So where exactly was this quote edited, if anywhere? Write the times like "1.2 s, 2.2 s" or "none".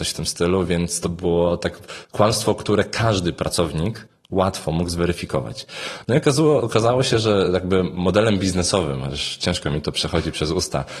none